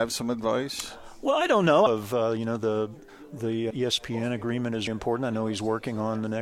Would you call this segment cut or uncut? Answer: cut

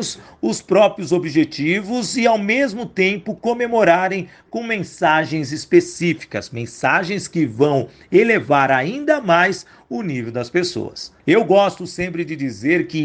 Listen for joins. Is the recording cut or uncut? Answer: cut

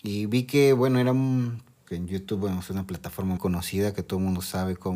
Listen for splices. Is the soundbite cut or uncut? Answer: cut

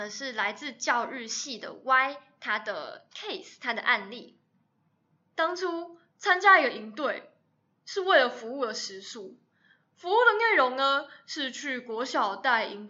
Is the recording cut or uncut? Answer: uncut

